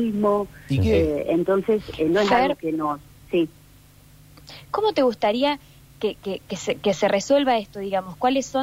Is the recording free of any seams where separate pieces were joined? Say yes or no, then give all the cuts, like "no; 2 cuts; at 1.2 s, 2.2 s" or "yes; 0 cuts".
yes; 0 cuts